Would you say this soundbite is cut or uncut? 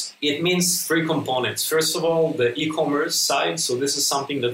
uncut